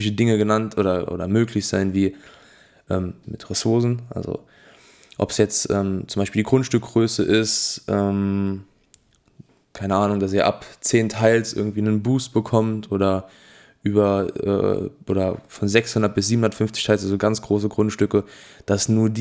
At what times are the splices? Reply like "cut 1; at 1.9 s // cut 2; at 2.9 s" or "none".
cut 1; at 1.1 s // cut 2; at 3.2 s